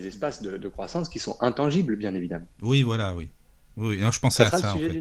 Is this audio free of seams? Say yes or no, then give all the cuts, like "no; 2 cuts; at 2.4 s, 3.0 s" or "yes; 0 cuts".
yes; 0 cuts